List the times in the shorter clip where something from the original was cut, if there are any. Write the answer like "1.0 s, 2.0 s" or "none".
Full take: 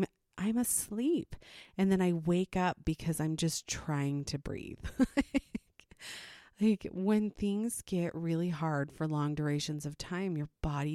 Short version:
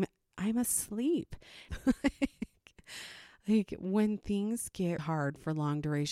1.7 s, 5.0 s